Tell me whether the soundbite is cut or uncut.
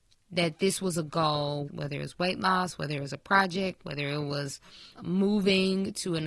cut